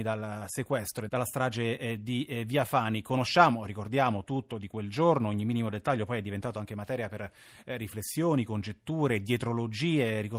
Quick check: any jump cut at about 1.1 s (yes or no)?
yes